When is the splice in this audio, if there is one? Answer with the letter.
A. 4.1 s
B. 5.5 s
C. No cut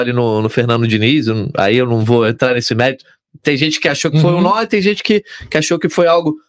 C